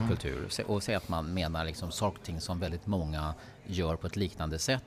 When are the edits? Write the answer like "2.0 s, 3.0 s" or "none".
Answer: none